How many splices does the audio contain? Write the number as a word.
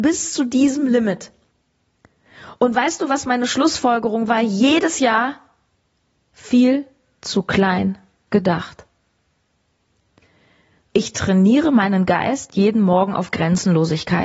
one